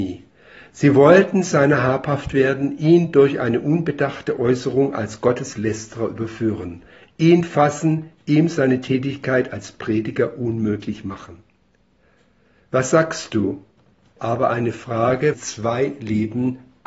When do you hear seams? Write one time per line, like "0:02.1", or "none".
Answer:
0:14.2
0:15.3